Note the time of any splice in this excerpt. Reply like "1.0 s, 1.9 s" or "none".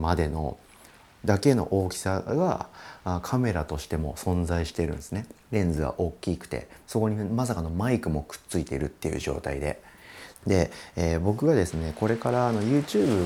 5.4 s, 10.3 s